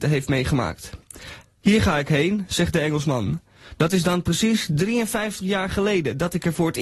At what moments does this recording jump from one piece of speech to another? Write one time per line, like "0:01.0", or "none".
0:01.4